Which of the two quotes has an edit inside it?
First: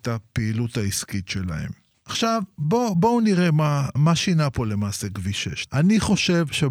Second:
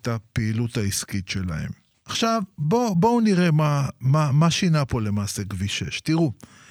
first; 2 cuts; at 4.0 s, 5.7 s

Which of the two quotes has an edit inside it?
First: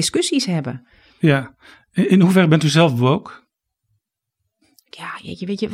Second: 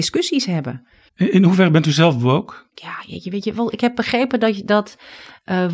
second; 2 cuts; at 1.1 s, 2.7 s

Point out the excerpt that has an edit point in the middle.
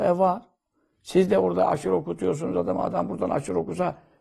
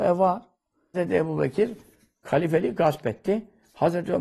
second; 1 cut; at 0.9 s

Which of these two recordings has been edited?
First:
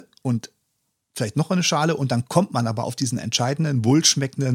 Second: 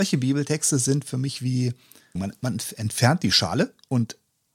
second; 1 cut; at 2.2 s

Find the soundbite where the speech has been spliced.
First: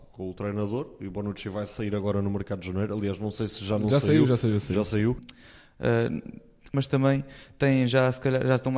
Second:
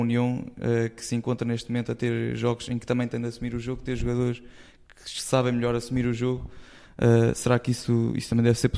first; 2 cuts; at 5.2 s, 6.7 s

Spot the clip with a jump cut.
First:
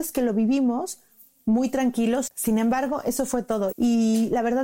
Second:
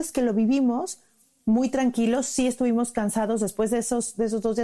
first; 2 cuts; at 2.3 s, 3.7 s

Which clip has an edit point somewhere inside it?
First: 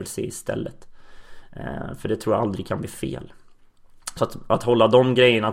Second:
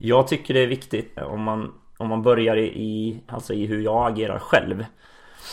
second; 2 cuts; at 1.2 s, 3.3 s

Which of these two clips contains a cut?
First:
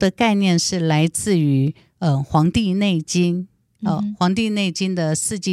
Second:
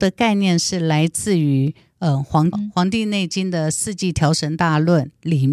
second; 1 cut; at 2.5 s

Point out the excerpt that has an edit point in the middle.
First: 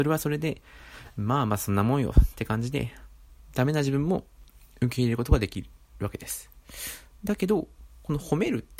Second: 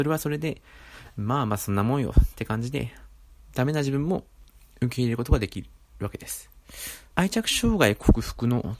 second; 1 cut; at 7.1 s

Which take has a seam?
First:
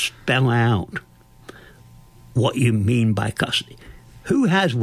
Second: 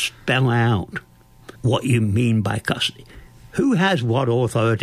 second; 1 cut; at 1.6 s

